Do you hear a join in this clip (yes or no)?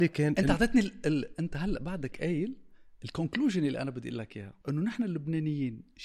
yes